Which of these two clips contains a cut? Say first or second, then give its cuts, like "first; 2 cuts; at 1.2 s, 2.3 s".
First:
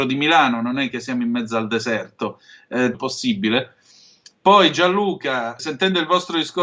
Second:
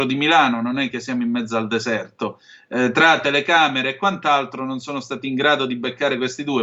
first; 2 cuts; at 2.9 s, 5.6 s